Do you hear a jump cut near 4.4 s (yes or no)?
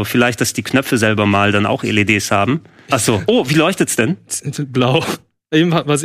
no